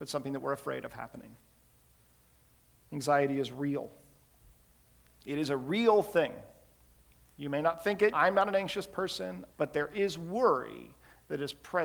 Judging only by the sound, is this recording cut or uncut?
cut